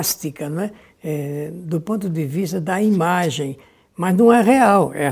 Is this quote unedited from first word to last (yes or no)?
yes